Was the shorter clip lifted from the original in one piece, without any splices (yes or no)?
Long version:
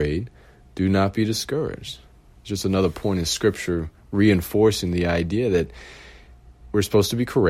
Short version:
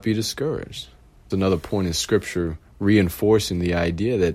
no